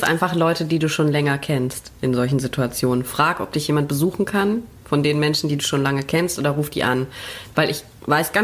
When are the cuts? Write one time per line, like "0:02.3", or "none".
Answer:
none